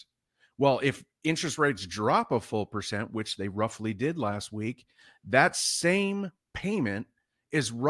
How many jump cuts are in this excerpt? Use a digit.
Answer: 0